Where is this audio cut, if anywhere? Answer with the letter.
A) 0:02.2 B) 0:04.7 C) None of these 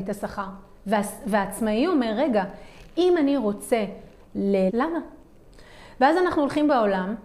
B